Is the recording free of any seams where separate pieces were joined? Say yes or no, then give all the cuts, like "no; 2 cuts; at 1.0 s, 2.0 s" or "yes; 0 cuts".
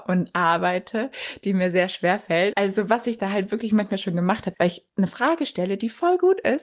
no; 2 cuts; at 2.5 s, 4.5 s